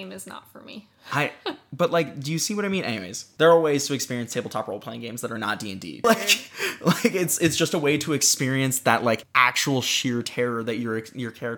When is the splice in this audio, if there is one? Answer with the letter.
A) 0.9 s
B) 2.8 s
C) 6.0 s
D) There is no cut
C